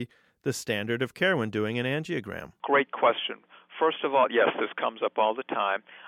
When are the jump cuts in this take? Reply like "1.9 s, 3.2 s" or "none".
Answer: none